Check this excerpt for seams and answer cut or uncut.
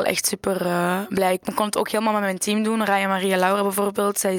uncut